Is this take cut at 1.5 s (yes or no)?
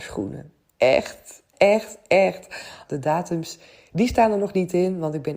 yes